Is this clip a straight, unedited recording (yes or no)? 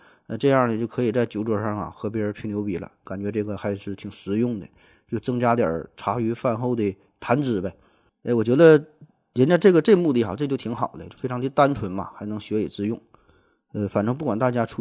yes